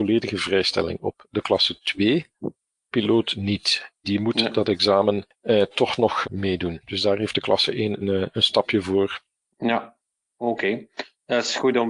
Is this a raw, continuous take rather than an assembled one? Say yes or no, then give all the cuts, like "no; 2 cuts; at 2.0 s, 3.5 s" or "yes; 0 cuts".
no; 2 cuts; at 6.2 s, 8.0 s